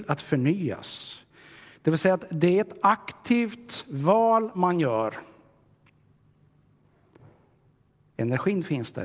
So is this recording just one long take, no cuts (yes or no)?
yes